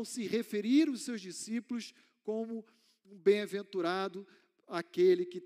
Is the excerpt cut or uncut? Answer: uncut